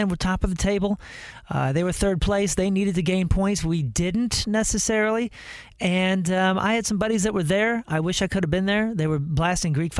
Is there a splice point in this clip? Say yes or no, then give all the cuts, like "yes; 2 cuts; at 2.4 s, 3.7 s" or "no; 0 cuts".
no; 0 cuts